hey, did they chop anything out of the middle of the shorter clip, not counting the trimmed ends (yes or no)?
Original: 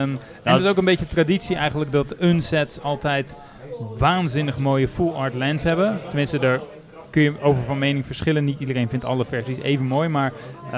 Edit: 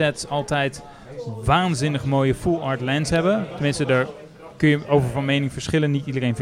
no